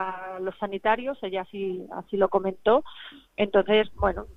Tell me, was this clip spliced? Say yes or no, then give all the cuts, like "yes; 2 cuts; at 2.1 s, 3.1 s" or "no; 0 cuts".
no; 0 cuts